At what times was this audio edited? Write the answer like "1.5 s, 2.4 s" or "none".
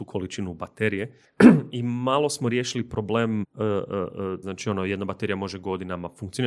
3.4 s, 4.4 s